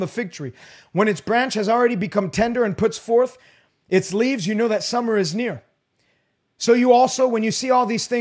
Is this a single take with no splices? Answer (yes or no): yes